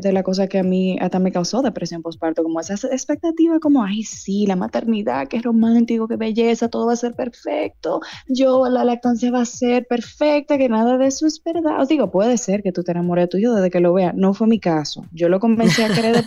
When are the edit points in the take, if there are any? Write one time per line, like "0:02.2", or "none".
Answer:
0:08.3